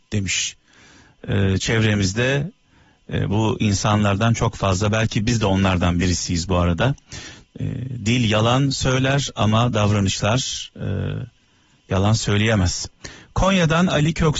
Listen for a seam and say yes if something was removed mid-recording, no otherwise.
yes